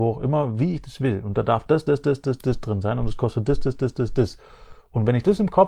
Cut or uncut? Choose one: uncut